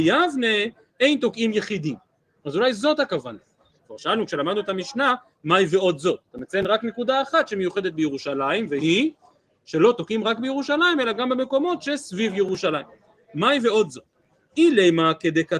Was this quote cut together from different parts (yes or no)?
yes